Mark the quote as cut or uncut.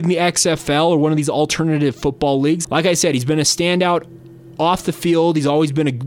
cut